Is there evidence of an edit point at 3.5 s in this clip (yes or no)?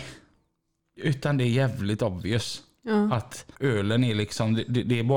yes